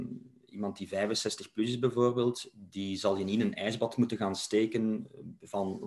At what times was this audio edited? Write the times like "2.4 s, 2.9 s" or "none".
none